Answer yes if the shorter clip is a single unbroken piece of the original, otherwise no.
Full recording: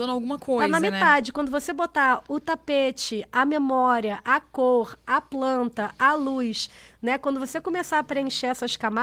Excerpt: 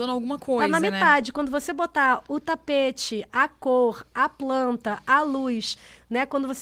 no